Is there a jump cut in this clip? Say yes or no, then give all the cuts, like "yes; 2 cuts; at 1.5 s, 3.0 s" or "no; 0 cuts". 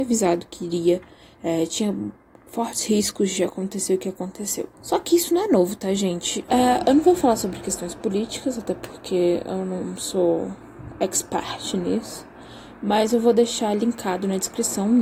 yes; 2 cuts; at 4.7 s, 6.5 s